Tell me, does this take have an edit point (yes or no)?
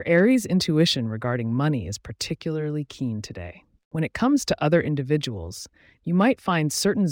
yes